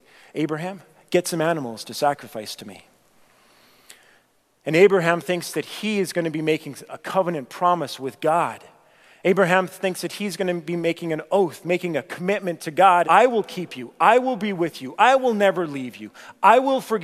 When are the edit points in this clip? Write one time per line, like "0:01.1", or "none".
0:13.0